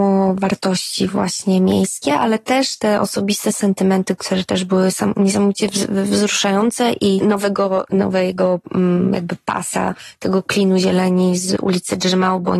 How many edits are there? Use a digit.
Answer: 1